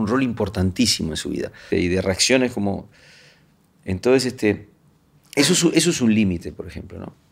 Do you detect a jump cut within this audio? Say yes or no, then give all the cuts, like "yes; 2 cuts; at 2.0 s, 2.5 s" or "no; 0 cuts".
yes; 1 cut; at 1.7 s